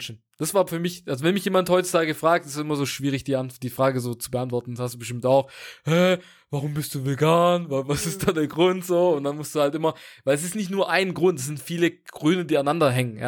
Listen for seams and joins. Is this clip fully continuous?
yes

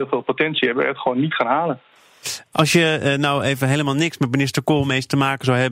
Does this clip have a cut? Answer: no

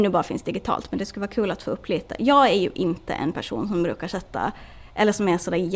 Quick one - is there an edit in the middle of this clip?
no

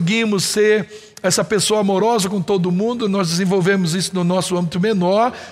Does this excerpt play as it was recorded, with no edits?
yes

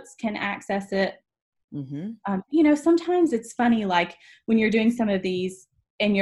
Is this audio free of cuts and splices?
no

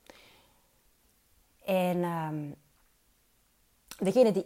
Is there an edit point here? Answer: no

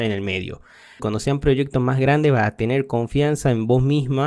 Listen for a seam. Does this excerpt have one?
yes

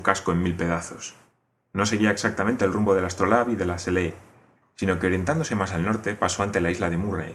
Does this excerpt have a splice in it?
yes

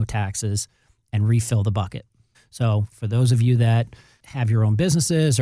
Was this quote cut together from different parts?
yes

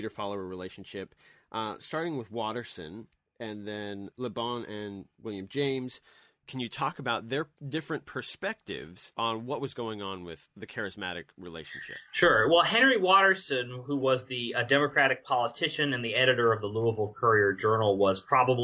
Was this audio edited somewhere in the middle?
no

